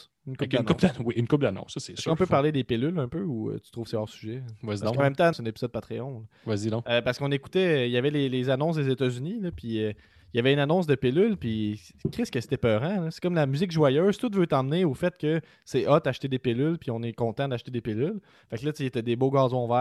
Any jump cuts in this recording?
yes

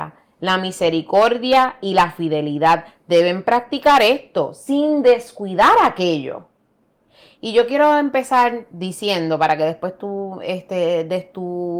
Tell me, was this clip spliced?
no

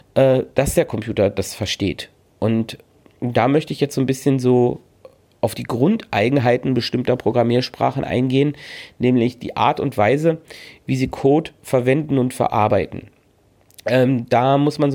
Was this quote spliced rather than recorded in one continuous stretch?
no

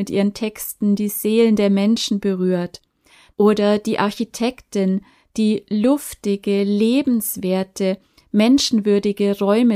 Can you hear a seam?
yes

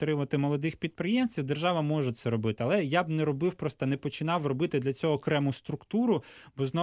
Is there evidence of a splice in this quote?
no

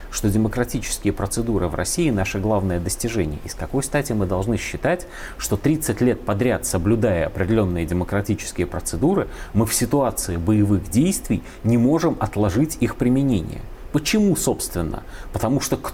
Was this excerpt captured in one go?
yes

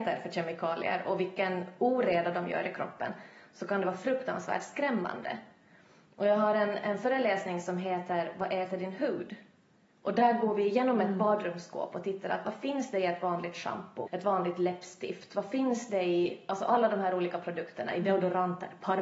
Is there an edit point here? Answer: yes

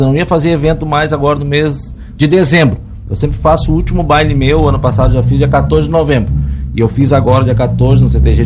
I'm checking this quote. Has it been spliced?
no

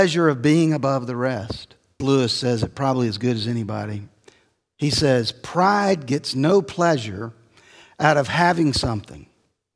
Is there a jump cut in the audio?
yes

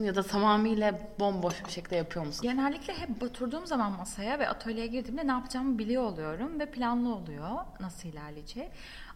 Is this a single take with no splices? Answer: no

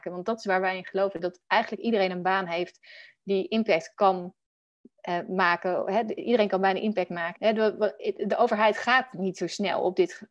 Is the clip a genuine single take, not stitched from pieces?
no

